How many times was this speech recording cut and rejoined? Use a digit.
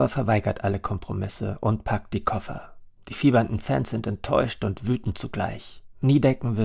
0